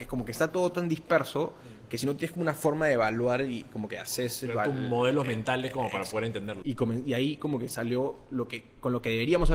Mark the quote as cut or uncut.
cut